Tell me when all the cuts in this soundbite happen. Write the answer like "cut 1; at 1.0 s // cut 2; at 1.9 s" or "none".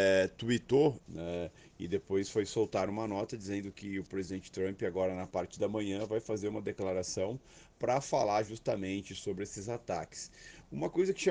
cut 1; at 1.0 s